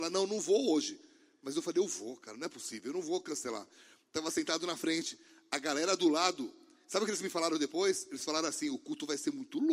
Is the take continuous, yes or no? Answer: yes